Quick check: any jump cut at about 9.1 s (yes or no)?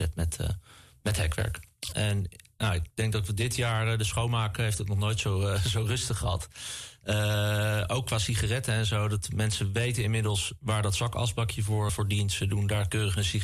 no